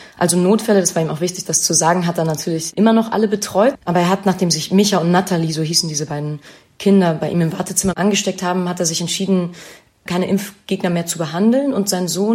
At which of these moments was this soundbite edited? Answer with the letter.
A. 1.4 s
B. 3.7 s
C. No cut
B